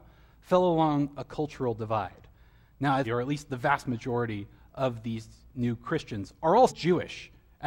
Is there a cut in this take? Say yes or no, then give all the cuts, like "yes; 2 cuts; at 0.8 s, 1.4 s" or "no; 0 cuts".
yes; 2 cuts; at 3.0 s, 6.7 s